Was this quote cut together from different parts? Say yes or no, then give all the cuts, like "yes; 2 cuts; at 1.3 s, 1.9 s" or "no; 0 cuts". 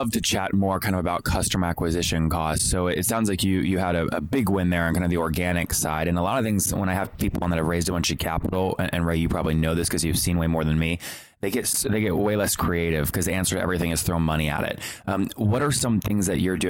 no; 0 cuts